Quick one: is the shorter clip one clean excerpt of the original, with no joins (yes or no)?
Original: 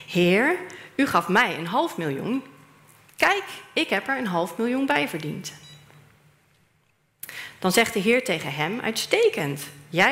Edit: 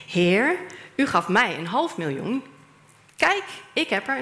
yes